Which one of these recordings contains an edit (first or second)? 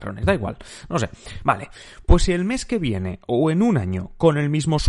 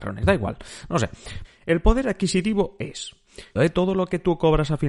second